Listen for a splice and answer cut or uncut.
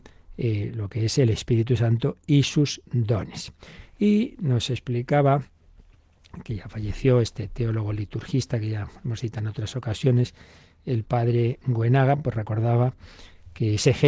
uncut